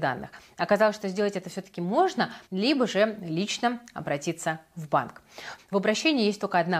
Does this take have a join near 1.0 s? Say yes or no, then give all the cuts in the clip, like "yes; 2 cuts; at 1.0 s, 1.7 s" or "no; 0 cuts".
no; 2 cuts; at 2.5 s, 5.6 s